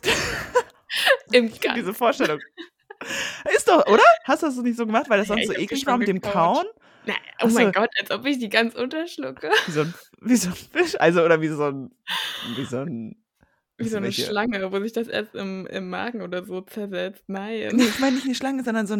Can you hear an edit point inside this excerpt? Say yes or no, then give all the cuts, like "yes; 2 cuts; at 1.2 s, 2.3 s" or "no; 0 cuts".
no; 0 cuts